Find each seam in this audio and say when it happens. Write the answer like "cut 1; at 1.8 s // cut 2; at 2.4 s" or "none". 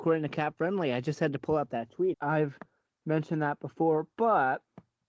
cut 1; at 2.1 s